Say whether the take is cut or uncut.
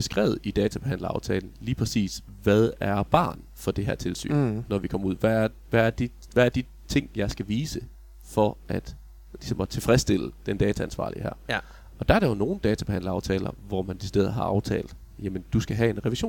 uncut